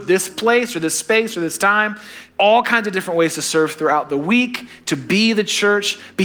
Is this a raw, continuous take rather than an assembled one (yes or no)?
no